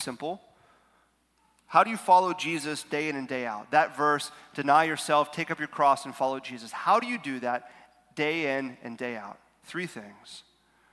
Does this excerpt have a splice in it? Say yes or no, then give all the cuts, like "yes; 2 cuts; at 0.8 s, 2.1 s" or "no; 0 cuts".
no; 0 cuts